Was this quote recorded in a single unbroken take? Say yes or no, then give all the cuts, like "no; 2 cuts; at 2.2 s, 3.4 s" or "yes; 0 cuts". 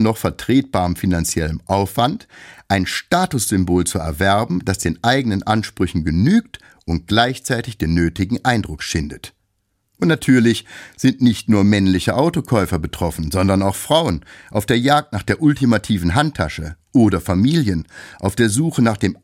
no; 1 cut; at 9.8 s